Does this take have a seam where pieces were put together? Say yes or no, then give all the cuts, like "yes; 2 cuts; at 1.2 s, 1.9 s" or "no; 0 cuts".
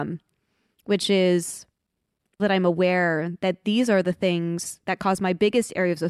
yes; 1 cut; at 2.4 s